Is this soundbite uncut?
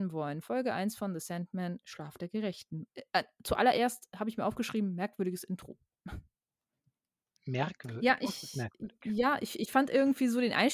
no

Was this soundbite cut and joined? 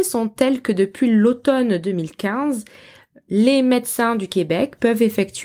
no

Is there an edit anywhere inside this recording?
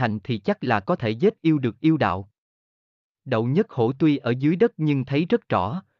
yes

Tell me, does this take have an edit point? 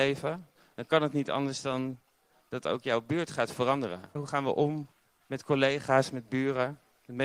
yes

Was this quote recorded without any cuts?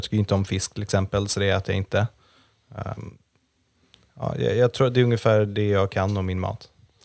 yes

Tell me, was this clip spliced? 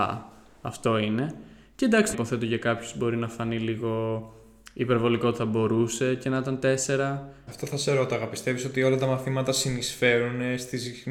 yes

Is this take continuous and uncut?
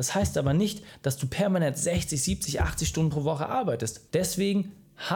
no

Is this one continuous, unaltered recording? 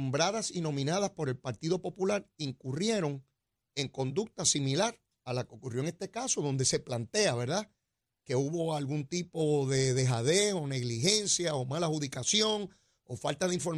yes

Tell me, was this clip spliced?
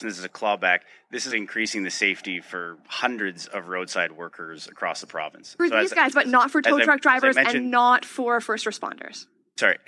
yes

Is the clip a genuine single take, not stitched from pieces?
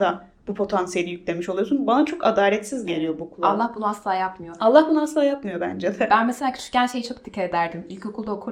yes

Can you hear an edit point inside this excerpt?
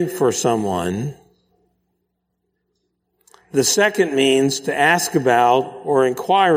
no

